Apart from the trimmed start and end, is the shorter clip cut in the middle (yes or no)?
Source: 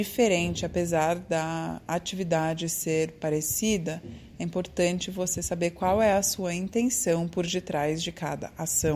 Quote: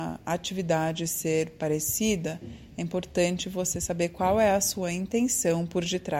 no